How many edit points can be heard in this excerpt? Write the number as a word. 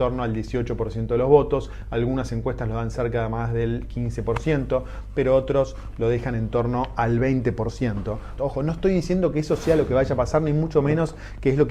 one